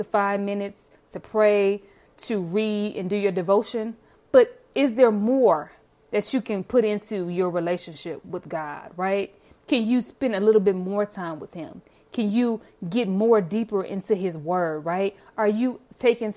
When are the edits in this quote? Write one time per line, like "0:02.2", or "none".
none